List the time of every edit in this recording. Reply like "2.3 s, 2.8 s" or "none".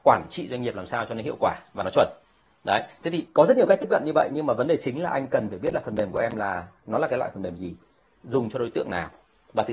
none